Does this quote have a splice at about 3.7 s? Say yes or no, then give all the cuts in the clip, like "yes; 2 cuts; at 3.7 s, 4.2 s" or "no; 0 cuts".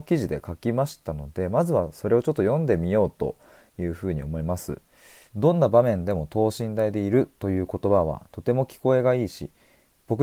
no; 1 cut; at 5.3 s